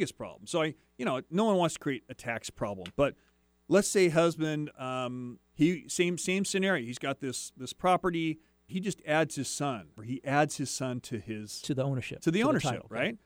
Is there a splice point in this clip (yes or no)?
yes